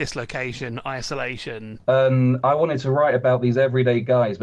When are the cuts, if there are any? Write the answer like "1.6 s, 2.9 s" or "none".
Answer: 1.8 s